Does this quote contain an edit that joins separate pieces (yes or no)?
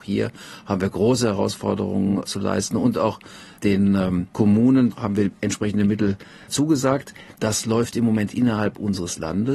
yes